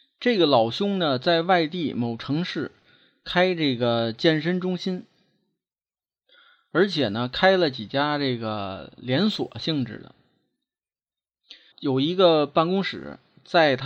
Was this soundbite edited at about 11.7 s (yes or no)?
yes